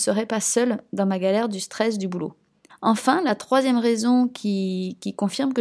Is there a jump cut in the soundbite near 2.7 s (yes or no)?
yes